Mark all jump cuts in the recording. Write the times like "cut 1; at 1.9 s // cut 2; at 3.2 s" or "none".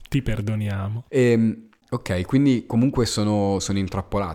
cut 1; at 1.1 s